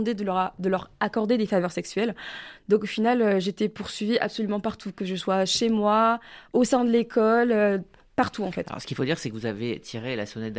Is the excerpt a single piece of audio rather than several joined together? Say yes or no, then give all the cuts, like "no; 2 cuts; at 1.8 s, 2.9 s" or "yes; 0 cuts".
yes; 0 cuts